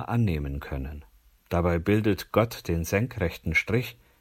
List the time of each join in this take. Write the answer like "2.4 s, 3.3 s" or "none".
1.4 s